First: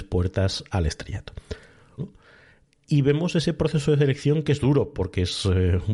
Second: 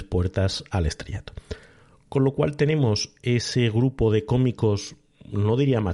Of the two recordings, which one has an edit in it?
first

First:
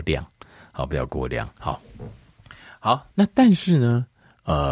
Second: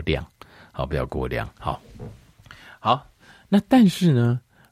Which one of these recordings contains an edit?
first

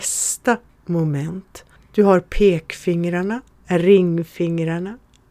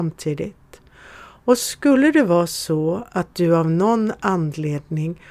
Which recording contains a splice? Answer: first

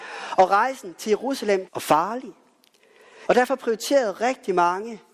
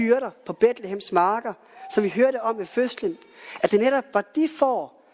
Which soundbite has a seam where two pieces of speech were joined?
first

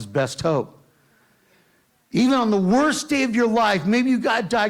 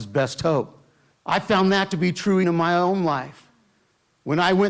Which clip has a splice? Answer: second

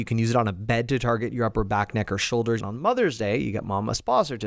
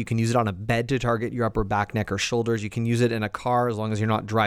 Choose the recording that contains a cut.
first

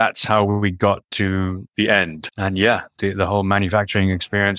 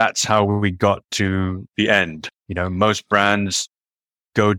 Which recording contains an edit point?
second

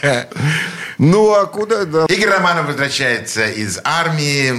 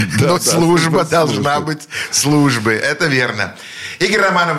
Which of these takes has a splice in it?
first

